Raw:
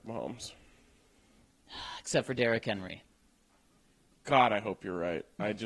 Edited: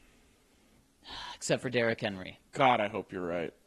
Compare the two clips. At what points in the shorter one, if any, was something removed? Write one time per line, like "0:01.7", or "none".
0:02.5